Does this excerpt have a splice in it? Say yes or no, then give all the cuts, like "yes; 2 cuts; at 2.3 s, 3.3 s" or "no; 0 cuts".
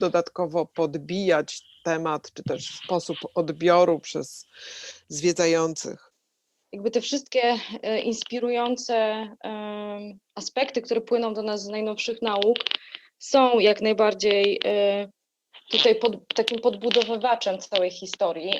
no; 0 cuts